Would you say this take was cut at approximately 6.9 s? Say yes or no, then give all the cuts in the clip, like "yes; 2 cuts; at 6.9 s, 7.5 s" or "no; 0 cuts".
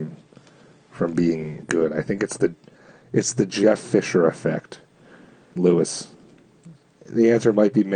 yes; 3 cuts; at 1.6 s, 5.6 s, 6.9 s